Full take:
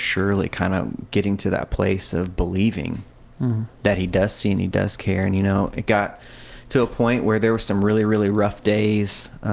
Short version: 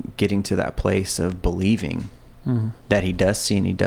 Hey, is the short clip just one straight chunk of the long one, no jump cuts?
yes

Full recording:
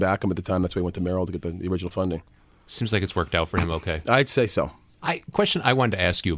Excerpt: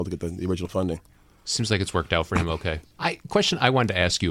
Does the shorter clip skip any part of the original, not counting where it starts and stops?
yes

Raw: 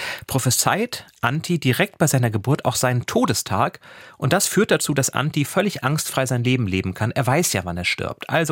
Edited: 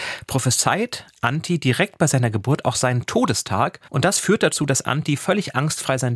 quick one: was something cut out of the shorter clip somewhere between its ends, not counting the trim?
yes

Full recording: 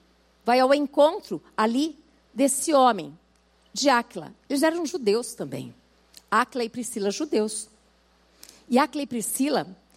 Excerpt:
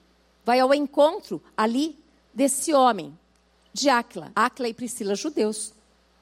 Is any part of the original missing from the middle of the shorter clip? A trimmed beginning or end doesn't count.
yes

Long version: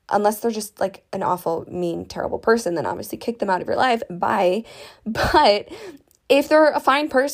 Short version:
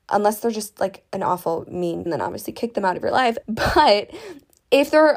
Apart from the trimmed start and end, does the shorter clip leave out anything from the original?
yes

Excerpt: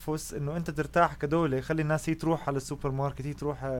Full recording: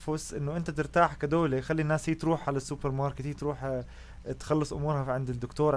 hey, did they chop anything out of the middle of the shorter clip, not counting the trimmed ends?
no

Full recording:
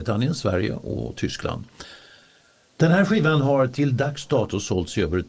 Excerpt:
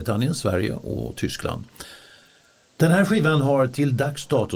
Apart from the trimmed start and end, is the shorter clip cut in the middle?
no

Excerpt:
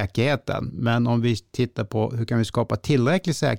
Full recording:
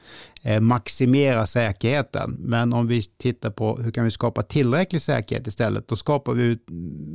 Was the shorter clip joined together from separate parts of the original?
no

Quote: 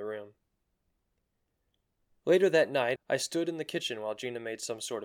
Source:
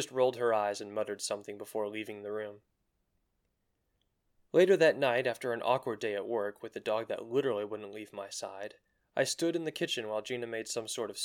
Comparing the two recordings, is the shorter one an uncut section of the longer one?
no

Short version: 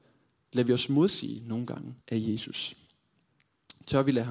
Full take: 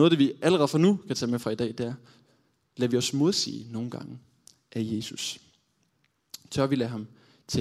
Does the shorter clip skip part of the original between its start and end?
yes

